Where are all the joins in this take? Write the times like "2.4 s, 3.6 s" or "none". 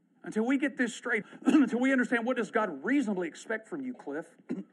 1.2 s